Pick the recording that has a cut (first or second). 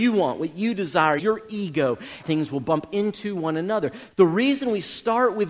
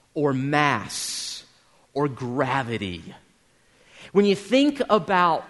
first